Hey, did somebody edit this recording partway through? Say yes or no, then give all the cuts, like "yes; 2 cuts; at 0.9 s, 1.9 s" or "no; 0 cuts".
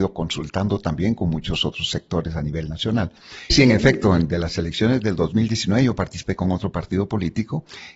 yes; 1 cut; at 3.5 s